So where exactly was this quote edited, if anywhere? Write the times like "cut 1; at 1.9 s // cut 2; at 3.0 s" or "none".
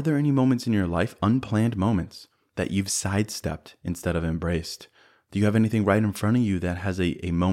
none